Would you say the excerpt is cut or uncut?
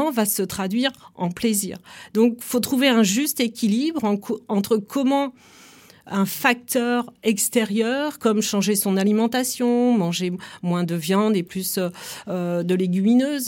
uncut